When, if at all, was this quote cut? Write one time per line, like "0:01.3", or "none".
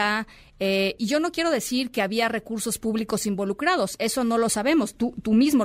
0:01.0